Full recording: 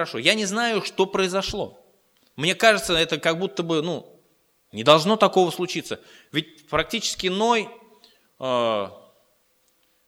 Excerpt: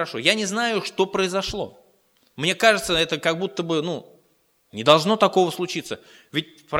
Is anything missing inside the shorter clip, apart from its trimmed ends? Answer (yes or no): no